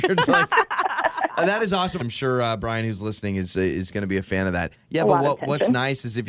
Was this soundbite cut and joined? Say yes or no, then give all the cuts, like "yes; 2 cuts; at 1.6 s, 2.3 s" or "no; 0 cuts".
yes; 2 cuts; at 2.0 s, 4.7 s